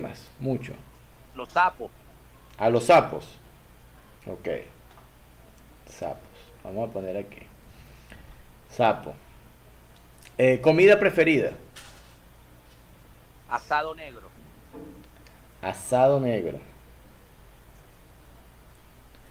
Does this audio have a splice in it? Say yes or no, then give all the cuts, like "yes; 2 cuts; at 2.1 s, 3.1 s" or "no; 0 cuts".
yes; 1 cut; at 4.2 s